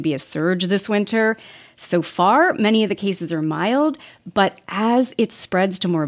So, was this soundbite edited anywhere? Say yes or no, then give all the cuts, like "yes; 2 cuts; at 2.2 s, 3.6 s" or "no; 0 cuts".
no; 0 cuts